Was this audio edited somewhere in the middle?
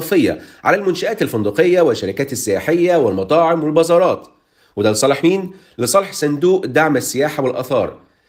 no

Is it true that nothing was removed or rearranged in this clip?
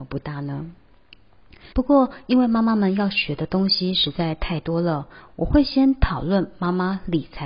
no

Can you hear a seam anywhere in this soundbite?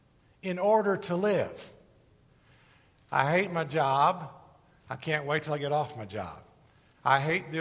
no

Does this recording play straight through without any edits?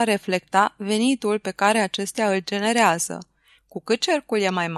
yes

